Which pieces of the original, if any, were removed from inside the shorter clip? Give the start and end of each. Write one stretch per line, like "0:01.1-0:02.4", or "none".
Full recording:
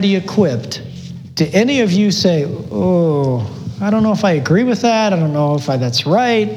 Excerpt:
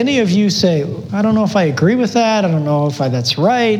0:02.7-0:03.8

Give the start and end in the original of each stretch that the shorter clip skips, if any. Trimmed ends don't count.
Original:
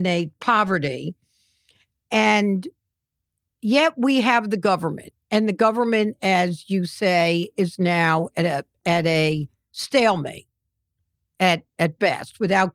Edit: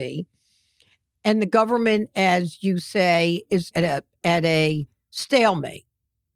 0:02.0-0:05.2
0:07.8-0:08.3

